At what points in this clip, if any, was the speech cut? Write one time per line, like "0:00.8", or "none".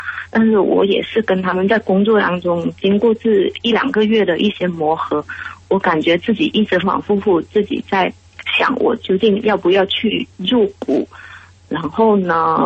0:06.8
0:10.3
0:11.6